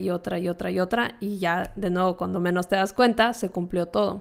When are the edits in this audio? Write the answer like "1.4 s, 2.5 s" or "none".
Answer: none